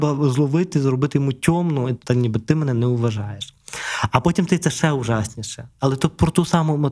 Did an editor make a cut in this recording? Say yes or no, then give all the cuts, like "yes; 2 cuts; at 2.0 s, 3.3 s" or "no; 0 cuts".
yes; 1 cut; at 2.0 s